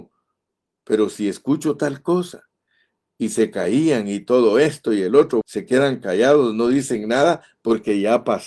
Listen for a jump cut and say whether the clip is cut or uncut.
cut